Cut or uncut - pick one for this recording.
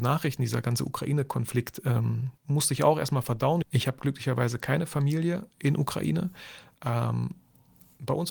cut